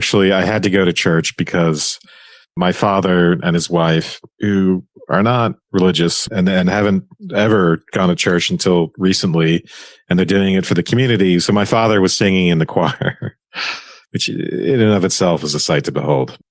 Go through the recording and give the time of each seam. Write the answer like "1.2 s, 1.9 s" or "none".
none